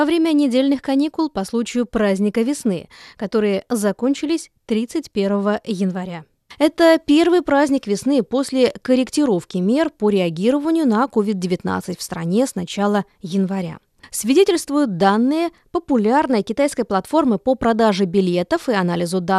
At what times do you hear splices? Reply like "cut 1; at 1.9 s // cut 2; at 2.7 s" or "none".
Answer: cut 1; at 14.0 s